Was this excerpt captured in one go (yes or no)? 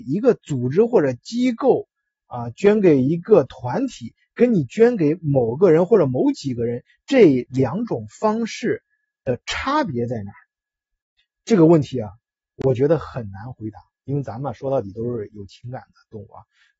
yes